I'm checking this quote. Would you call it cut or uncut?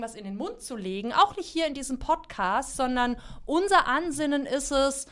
uncut